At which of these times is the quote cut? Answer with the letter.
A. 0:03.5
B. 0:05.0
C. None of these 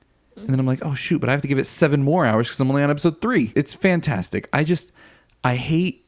A